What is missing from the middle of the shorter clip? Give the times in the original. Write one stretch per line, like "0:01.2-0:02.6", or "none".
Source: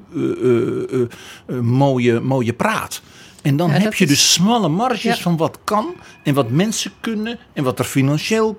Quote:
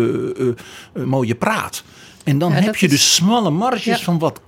0:01.6-0:02.2